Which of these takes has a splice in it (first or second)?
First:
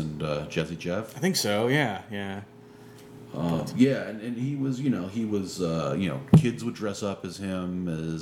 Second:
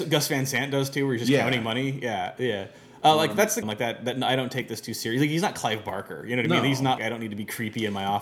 second